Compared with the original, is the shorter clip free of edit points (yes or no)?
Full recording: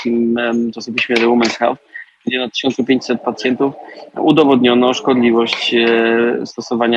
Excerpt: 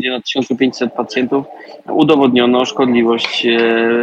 yes